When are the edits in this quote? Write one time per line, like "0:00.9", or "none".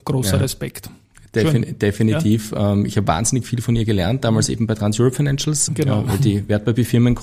0:05.7